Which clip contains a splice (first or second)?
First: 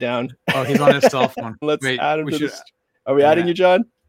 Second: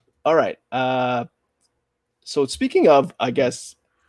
first